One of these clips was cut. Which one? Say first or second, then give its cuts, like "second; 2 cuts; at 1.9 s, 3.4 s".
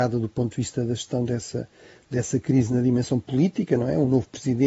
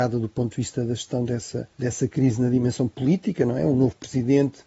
second; 1 cut; at 1.7 s